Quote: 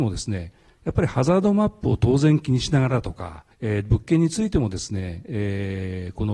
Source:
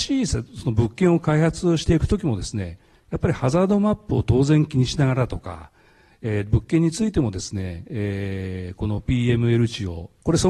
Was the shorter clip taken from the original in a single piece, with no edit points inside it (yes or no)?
no